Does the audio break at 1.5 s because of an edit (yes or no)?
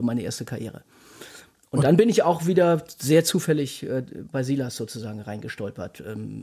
no